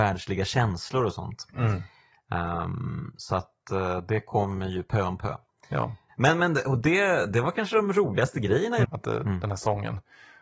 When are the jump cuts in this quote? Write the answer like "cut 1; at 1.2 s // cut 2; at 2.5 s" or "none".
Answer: cut 1; at 6.1 s // cut 2; at 8.8 s